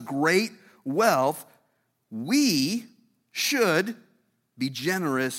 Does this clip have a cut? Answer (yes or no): no